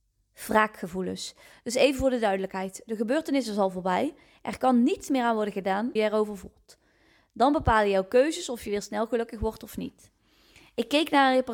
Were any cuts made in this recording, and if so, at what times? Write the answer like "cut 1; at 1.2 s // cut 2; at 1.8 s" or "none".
cut 1; at 6.0 s